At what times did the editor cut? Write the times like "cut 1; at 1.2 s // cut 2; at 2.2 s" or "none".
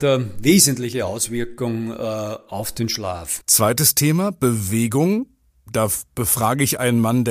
cut 1; at 3.4 s